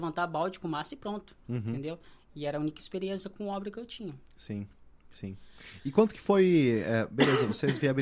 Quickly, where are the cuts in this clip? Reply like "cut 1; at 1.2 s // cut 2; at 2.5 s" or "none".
none